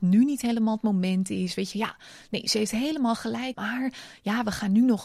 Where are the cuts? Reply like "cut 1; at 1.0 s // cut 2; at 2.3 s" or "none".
cut 1; at 1.7 s // cut 2; at 3.5 s